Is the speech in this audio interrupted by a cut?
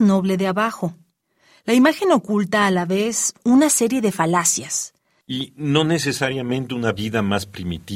yes; 1 cut; at 5.2 s

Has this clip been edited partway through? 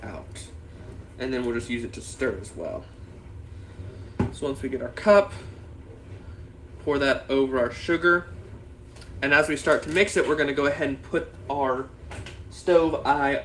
no; 0 cuts

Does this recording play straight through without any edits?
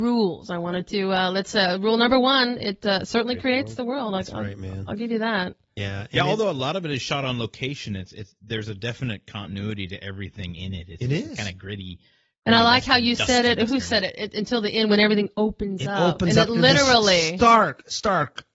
yes; 0 cuts

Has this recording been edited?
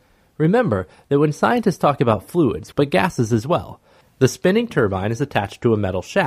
yes; 2 cuts; at 2.7 s, 4.0 s

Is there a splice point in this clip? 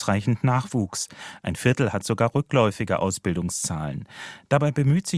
no; 0 cuts

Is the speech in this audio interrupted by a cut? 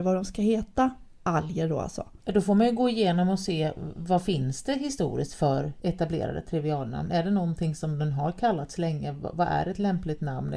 no; 0 cuts

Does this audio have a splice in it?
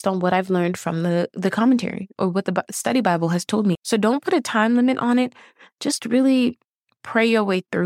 yes; 1 cut; at 3.8 s

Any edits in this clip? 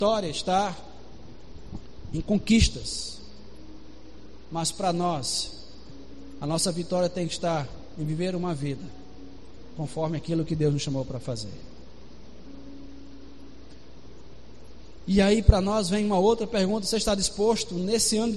no; 0 cuts

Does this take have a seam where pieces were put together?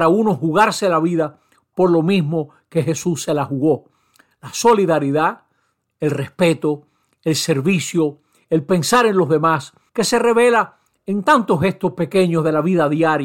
yes; 1 cut; at 9.9 s

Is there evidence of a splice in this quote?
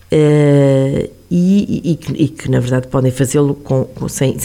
no; 0 cuts

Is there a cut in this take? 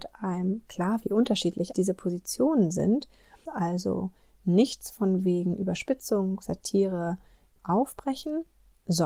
yes; 3 cuts; at 1.7 s, 3.5 s, 7.6 s

